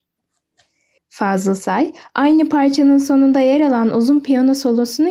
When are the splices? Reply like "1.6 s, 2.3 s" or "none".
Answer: 1.0 s